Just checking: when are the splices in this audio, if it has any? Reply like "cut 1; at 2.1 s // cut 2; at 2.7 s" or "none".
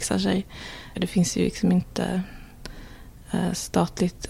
cut 1; at 0.9 s